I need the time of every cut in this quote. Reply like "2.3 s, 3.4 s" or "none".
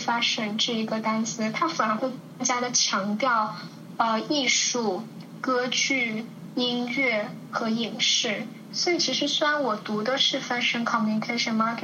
8.7 s